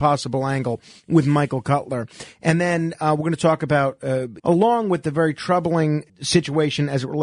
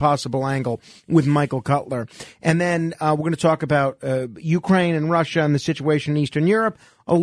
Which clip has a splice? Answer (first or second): first